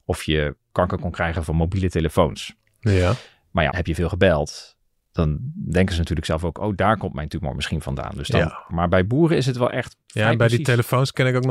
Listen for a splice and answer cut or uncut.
cut